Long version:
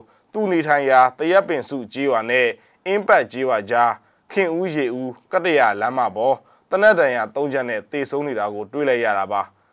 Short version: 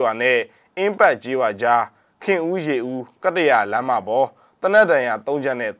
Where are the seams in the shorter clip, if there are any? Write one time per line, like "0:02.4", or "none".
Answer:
none